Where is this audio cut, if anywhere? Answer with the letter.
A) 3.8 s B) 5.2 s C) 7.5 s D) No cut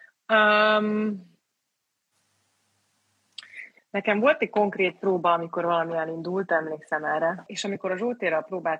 C